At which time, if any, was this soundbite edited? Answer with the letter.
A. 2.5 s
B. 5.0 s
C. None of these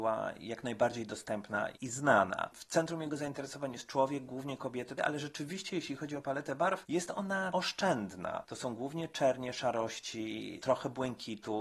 B